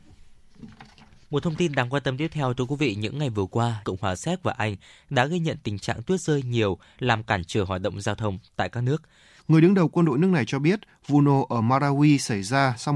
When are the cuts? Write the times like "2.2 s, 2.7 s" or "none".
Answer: 3.8 s, 9.4 s

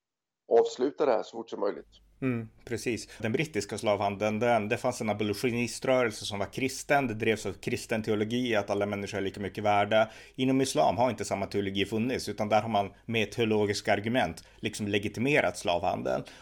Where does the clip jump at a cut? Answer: 3.2 s

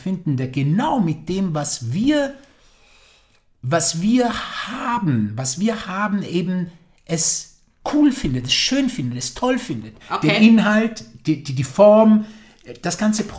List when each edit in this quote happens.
none

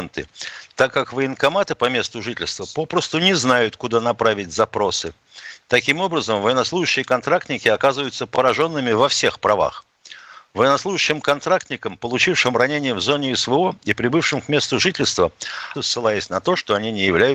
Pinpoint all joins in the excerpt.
5.6 s, 15.7 s

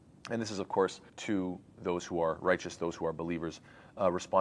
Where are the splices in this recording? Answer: 1.1 s

